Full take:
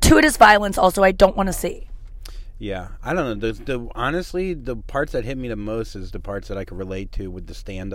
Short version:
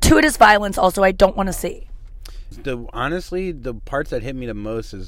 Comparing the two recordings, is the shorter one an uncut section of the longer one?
no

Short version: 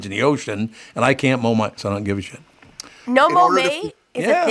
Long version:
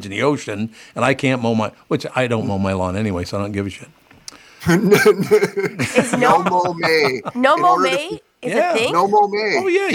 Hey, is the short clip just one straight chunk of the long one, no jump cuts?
no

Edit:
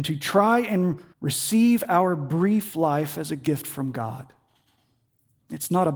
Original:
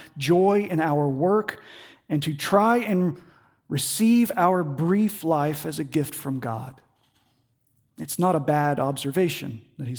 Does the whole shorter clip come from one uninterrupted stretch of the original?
no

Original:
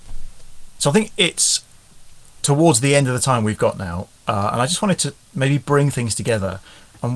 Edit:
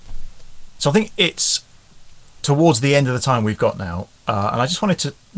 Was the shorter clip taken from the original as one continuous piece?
yes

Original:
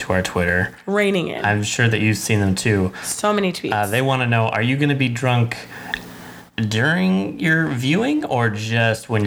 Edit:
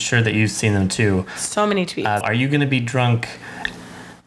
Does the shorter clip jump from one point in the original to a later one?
yes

